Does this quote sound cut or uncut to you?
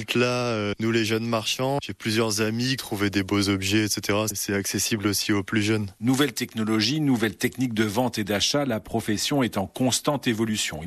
cut